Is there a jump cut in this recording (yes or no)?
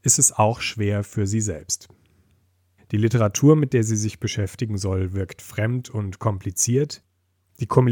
yes